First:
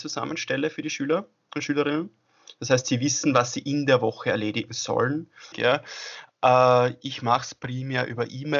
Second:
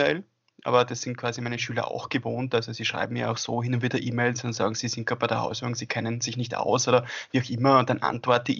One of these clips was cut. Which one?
first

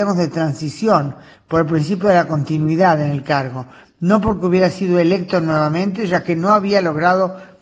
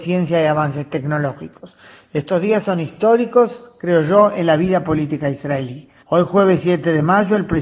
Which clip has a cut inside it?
second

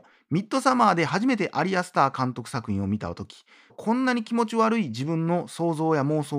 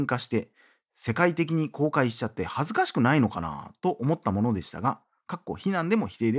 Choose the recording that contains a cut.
first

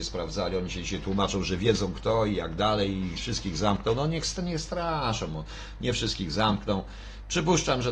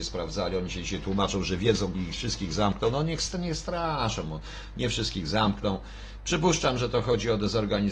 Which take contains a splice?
second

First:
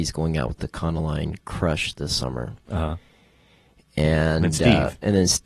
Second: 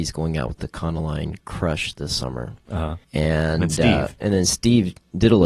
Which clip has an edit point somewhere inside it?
second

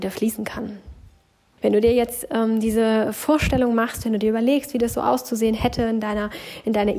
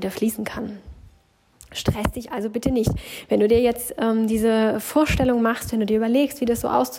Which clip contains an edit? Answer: first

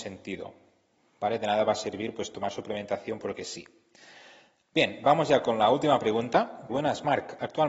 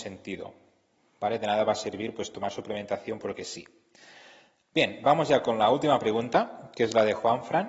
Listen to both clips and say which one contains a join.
first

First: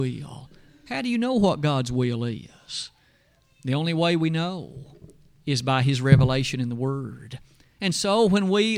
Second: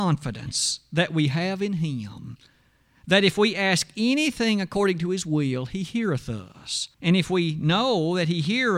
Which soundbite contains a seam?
second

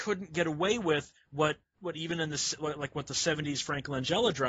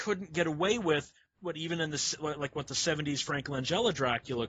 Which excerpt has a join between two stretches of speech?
second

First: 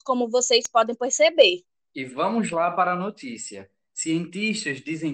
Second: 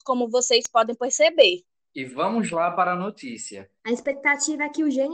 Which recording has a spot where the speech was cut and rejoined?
second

